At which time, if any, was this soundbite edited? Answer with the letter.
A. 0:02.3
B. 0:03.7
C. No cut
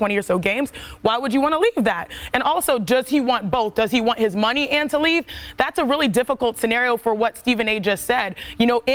C